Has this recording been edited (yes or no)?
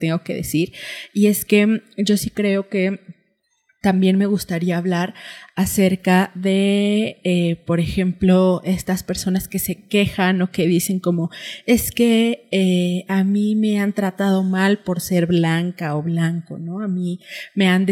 no